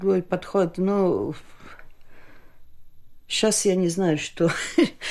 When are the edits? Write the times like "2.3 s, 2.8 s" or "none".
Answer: none